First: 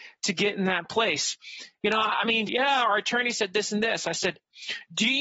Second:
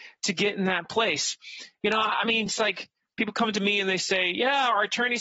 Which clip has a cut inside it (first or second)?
first